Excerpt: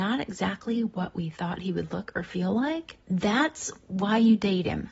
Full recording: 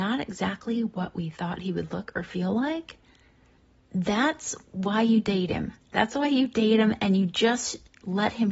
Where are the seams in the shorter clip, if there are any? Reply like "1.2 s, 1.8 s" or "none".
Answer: 3.0 s